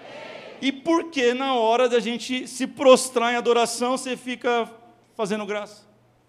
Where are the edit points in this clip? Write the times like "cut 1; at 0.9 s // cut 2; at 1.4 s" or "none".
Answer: none